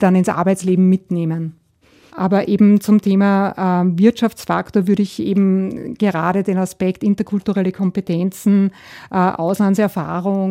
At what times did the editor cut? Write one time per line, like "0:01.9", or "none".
0:02.1